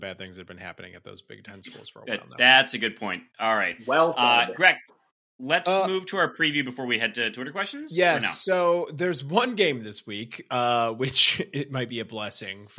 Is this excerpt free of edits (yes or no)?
yes